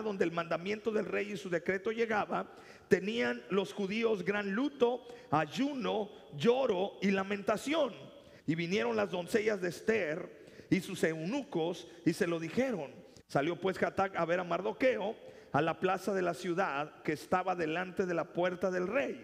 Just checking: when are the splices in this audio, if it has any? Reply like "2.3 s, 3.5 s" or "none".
8.4 s, 13.2 s